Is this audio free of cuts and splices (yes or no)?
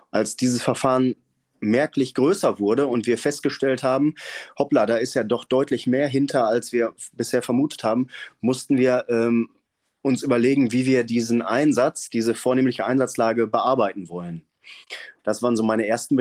no